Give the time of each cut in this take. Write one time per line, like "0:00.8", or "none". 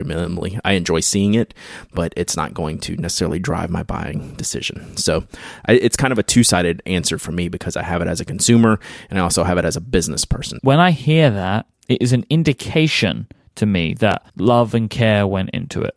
0:10.6
0:14.3